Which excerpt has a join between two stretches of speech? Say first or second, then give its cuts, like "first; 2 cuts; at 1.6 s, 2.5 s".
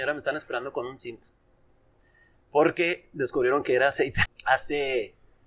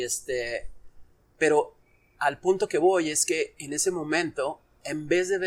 first; 1 cut; at 4.3 s